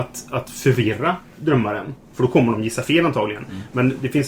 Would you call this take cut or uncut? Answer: uncut